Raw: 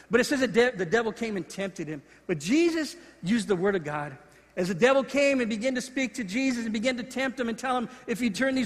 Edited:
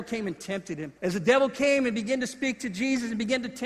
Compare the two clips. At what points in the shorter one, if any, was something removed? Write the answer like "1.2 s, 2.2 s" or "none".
1.0 s